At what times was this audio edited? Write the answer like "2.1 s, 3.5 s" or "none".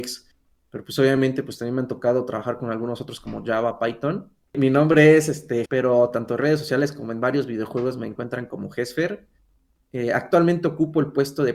4.5 s, 5.7 s